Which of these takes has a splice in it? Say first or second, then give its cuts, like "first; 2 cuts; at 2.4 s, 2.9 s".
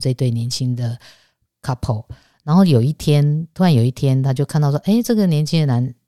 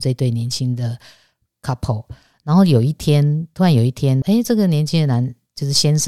second; 1 cut; at 4.2 s